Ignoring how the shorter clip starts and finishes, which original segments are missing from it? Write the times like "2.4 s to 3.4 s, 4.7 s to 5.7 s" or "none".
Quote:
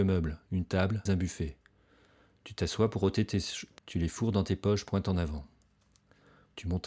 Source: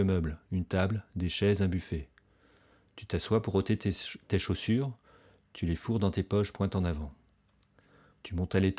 1.1 s to 1.6 s, 4.3 s to 5.5 s